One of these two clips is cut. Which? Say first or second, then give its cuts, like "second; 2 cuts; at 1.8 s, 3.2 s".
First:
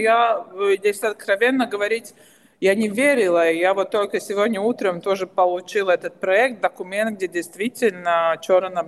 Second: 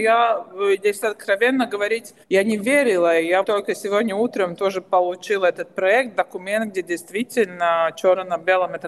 second; 2 cuts; at 2.2 s, 3.4 s